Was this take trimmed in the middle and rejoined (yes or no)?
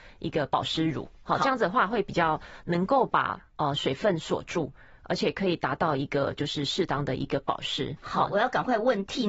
no